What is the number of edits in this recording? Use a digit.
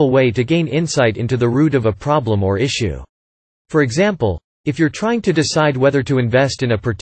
1